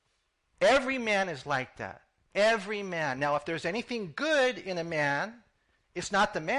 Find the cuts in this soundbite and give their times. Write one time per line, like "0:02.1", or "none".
none